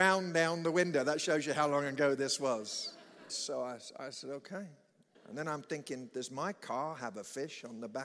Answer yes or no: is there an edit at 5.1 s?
yes